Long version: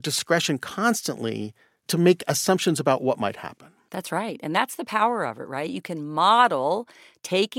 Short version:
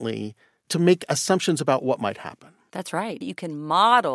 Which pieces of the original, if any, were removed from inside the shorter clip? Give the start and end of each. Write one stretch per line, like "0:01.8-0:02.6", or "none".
0:04.4-0:05.7

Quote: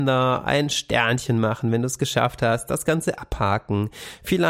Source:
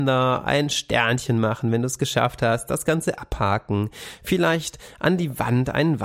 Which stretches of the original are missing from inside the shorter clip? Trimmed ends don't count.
none

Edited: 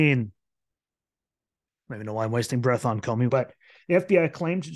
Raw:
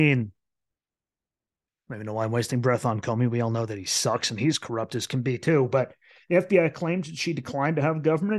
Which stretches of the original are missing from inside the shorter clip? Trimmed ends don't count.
0:03.3-0:05.7

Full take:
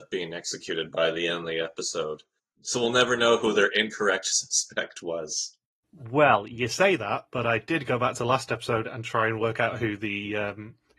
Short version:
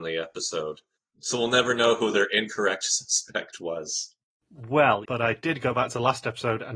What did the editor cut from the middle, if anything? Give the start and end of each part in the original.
0:06.5-0:07.3

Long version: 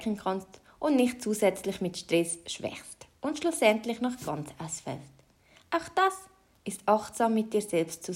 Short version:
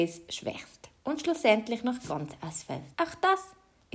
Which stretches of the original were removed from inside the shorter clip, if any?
0:05.1-0:05.7

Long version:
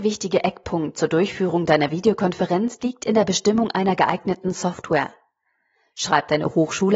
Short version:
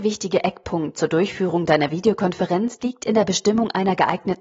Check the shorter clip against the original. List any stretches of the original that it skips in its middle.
none

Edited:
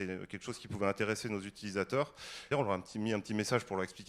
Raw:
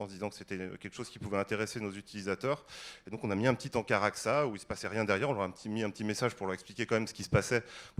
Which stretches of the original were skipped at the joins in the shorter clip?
0:03.0-0:05.2

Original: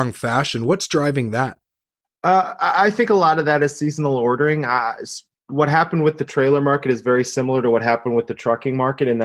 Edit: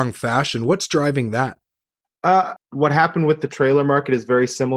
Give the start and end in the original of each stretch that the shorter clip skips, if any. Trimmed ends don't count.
0:02.6-0:05.3

